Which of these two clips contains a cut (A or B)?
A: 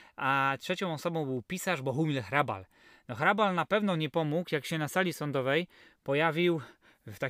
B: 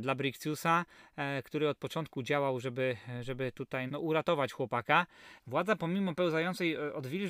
B